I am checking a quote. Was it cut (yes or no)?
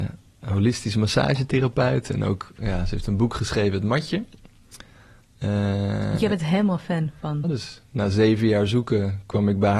yes